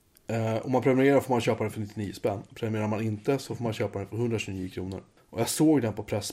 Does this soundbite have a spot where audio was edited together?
yes; 1 cut; at 5.2 s

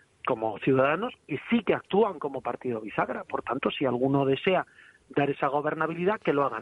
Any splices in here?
no; 0 cuts

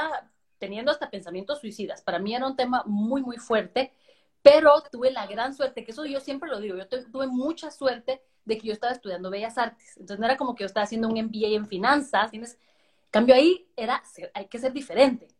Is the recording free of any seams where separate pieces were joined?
no; 1 cut; at 12.3 s

